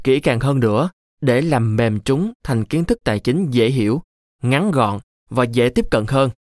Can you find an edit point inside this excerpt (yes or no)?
no